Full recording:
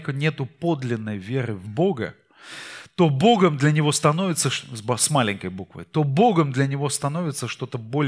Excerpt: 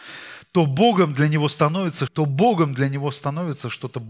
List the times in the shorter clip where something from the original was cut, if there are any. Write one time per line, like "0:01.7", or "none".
0:02.1